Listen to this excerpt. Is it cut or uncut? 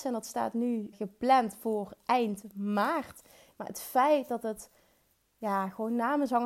cut